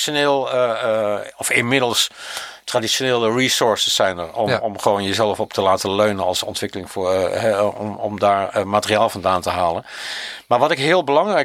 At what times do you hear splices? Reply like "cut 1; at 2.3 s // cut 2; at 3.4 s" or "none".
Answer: none

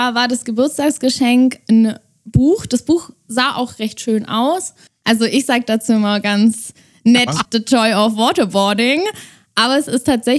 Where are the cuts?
cut 1; at 4.9 s // cut 2; at 7.4 s

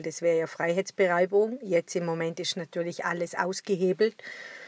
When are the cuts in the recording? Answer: none

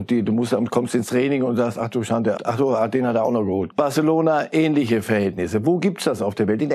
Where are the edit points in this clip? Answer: cut 1; at 2.4 s // cut 2; at 3.7 s

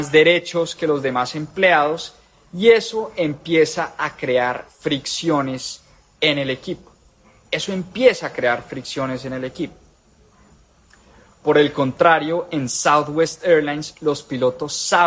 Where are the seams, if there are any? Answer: none

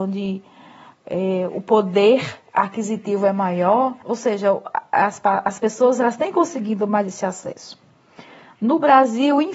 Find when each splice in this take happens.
cut 1; at 4.0 s

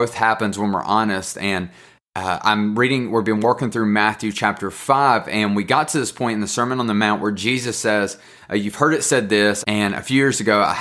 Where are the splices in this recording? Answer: cut 1; at 9.6 s

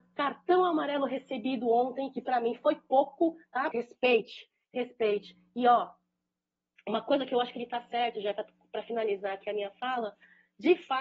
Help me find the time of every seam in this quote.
cut 1; at 3.7 s

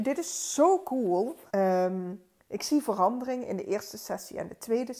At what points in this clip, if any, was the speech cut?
cut 1; at 1.5 s

